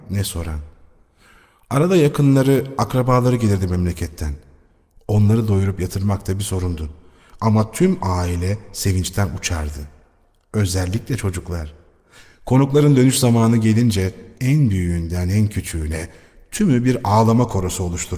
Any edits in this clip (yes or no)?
no